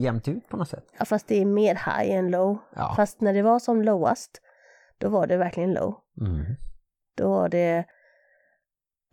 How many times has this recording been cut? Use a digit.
1